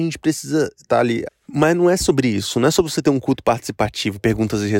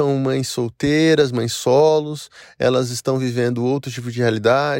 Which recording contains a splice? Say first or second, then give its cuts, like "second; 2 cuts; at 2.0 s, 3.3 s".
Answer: first; 1 cut; at 1.2 s